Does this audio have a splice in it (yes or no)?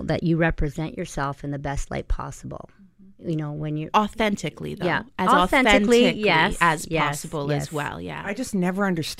no